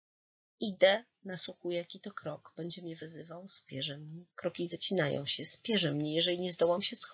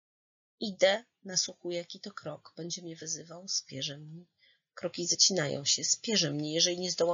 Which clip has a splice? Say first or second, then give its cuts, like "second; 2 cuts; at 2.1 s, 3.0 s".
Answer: first; 1 cut; at 4.3 s